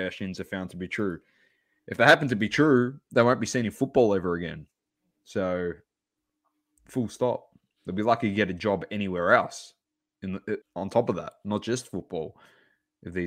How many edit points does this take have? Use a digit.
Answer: 1